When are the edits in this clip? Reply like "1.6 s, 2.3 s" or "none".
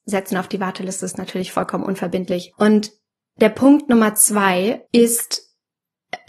2.5 s, 4.9 s

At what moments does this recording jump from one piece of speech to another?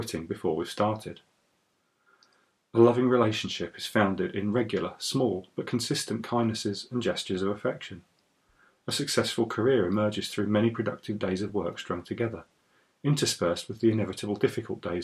none

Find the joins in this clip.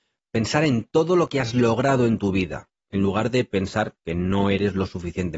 4.0 s

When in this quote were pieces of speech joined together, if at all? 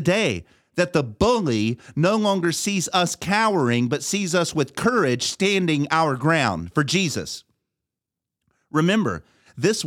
none

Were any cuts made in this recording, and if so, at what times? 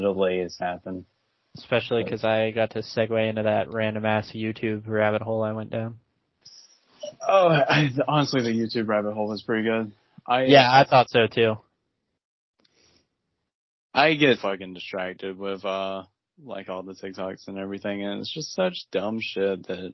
14.4 s

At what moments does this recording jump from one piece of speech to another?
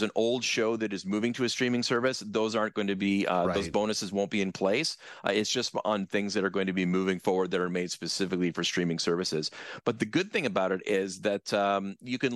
none

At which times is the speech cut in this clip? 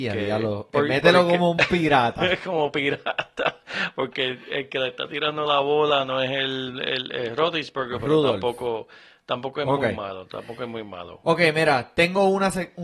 none

